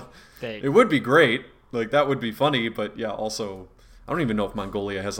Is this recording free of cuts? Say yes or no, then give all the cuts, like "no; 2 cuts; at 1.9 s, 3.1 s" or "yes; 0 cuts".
yes; 0 cuts